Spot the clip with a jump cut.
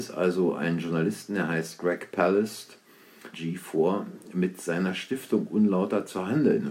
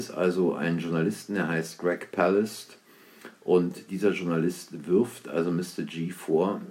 first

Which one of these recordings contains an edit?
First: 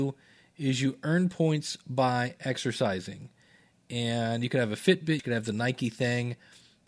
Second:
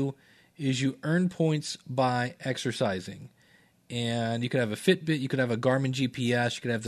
first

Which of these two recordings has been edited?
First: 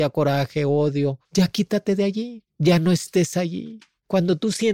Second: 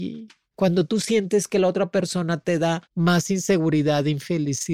first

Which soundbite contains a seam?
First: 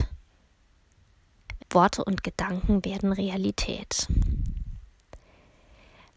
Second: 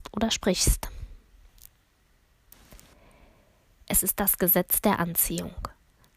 first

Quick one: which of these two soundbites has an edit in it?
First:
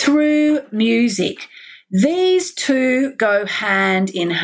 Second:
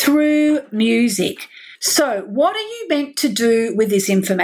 second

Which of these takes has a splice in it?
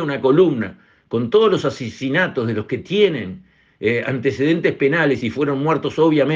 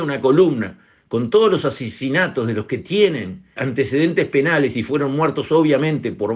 second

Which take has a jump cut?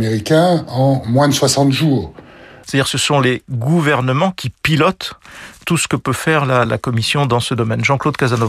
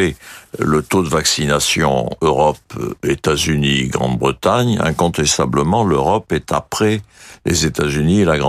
first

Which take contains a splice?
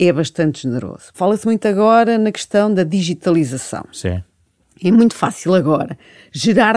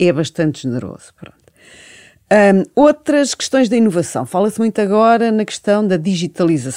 first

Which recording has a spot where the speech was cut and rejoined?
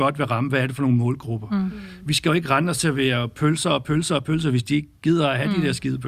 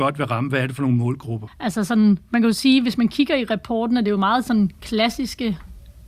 second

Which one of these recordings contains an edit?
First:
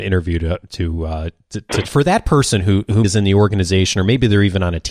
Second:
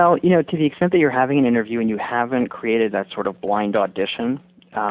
first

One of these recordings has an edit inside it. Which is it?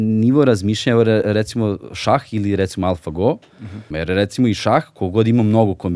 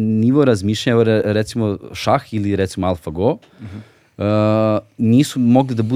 first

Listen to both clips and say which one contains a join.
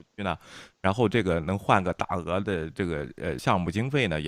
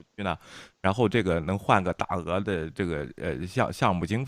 first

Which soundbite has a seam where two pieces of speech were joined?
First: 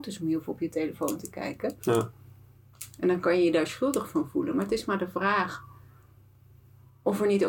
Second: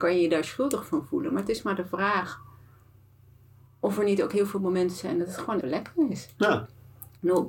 second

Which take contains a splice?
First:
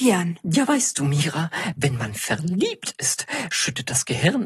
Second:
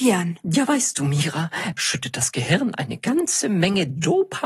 second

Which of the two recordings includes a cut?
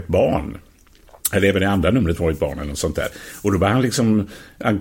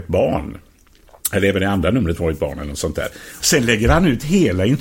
second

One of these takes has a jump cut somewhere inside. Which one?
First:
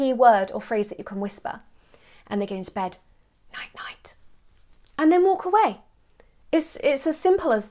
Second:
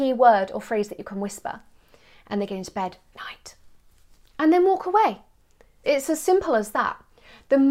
second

